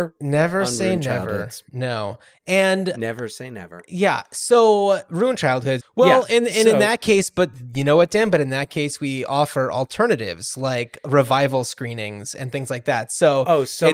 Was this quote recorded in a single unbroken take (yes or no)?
no